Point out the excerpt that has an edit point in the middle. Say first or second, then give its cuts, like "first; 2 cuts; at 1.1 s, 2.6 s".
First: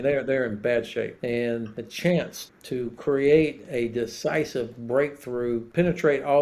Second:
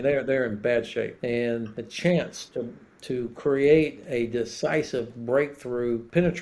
first; 1 cut; at 2.5 s